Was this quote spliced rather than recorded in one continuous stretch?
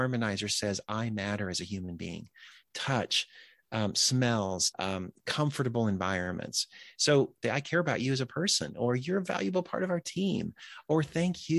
yes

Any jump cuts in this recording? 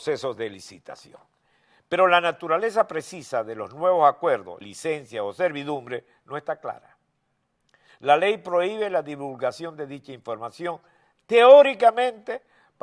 yes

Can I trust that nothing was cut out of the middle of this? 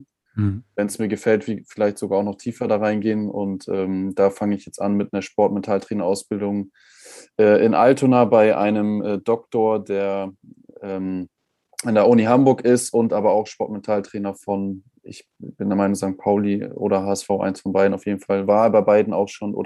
yes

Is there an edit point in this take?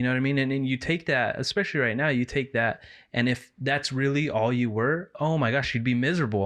no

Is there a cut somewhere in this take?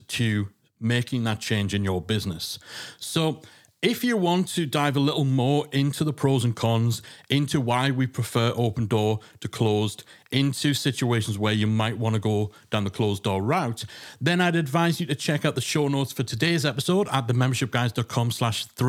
no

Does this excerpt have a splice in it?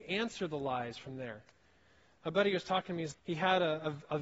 yes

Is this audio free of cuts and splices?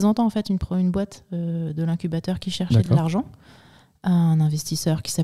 yes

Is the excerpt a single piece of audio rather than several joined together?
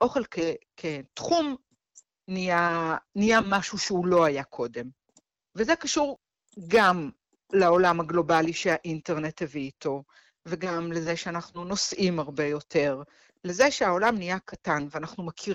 yes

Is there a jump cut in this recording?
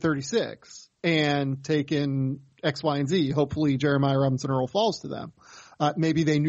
no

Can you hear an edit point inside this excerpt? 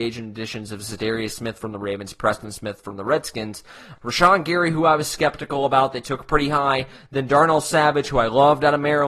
yes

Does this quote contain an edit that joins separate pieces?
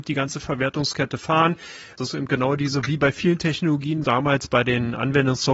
yes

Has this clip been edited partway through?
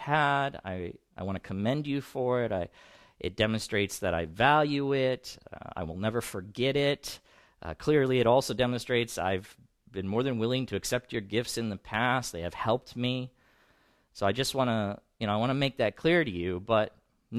yes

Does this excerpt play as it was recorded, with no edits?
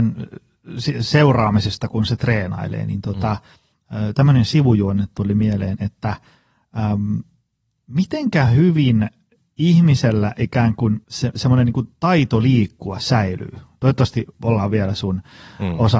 no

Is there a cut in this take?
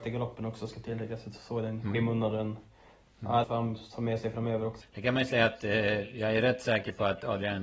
yes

